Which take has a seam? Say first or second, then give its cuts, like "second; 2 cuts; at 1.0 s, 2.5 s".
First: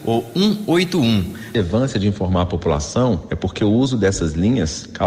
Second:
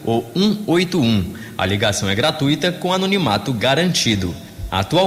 first; 1 cut; at 1.5 s